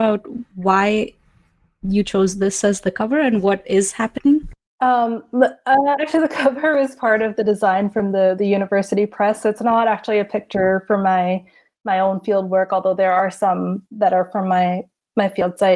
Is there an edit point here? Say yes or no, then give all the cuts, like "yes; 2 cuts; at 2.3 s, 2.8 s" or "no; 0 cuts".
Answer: no; 0 cuts